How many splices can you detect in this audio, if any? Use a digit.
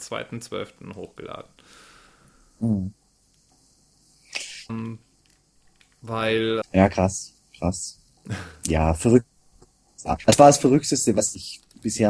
2